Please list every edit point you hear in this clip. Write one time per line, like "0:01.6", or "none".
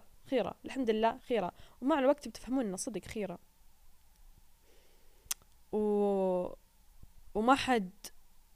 0:01.2